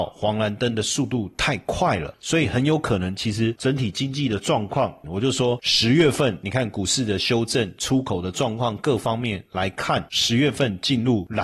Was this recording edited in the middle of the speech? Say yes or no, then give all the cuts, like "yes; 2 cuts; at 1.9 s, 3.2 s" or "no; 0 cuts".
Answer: yes; 1 cut; at 5.0 s